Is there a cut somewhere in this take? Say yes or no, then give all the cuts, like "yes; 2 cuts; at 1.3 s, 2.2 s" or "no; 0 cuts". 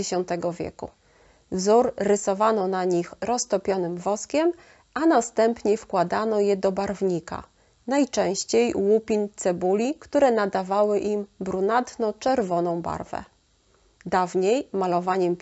no; 0 cuts